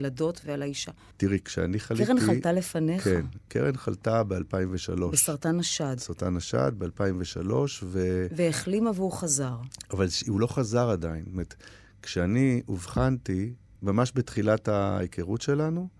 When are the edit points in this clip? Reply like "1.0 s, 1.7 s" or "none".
1.1 s, 13.8 s